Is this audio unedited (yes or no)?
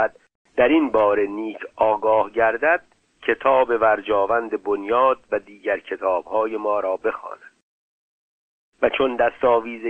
no